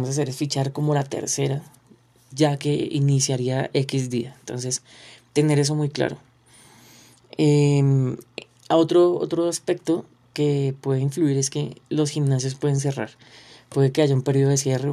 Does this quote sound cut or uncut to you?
cut